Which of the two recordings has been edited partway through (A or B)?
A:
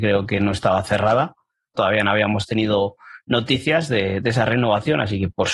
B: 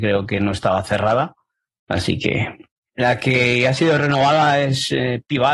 A